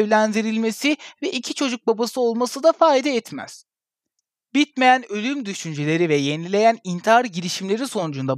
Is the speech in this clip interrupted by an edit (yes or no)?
no